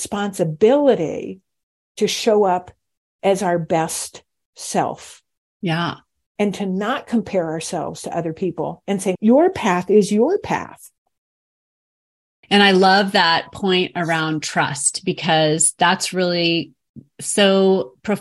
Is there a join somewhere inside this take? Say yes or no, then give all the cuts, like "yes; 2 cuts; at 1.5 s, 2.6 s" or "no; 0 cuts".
yes; 2 cuts; at 9.1 s, 12.4 s